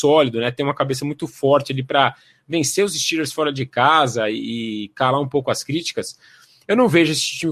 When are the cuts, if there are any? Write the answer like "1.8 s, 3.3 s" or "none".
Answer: none

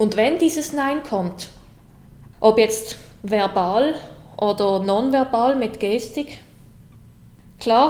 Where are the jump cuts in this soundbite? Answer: 2.3 s

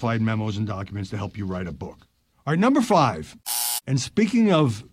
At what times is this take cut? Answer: 2.3 s

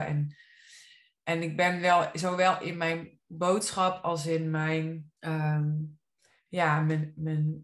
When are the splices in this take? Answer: 5.2 s

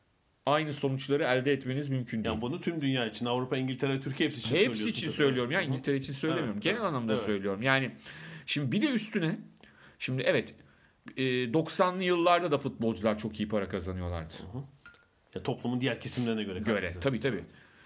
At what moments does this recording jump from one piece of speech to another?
none

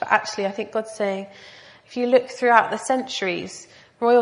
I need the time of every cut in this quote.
none

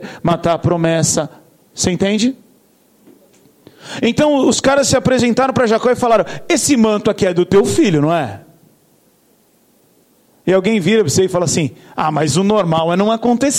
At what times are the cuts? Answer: none

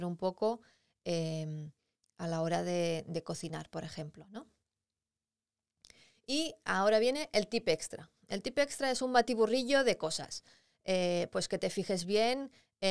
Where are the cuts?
none

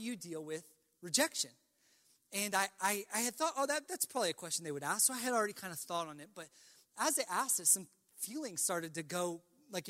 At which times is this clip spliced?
none

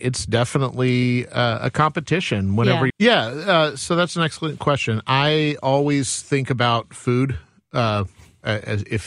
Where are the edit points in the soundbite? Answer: 2.9 s

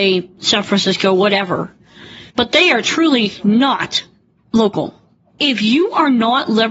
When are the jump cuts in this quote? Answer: 2.3 s

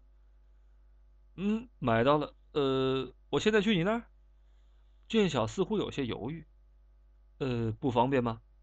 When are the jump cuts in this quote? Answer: none

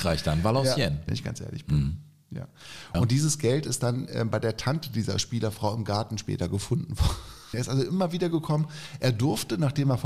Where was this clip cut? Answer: 1.1 s, 2.9 s, 7.5 s

